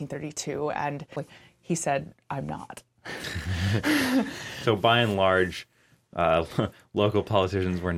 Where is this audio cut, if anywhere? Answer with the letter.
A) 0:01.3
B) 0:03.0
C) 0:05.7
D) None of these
A